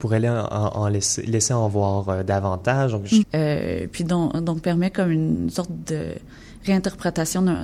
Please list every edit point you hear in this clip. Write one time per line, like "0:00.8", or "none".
0:03.2